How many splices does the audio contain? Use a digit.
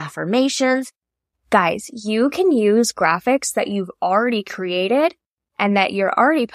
1